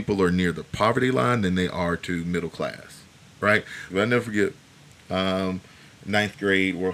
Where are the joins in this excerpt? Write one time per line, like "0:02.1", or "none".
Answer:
0:03.9